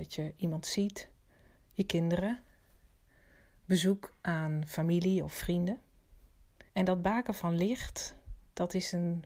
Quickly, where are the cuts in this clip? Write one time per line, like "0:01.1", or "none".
0:01.6
0:06.7